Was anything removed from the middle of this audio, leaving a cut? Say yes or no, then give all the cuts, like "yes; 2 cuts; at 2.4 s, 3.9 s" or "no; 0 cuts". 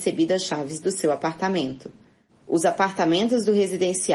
yes; 1 cut; at 2.3 s